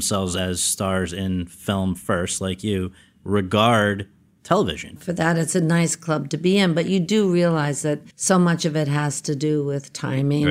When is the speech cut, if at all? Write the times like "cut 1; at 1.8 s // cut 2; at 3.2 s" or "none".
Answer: cut 1; at 5.0 s // cut 2; at 8.1 s